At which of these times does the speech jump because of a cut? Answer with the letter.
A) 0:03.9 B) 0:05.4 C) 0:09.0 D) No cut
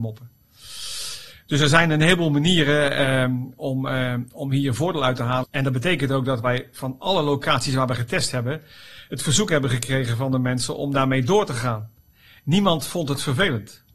B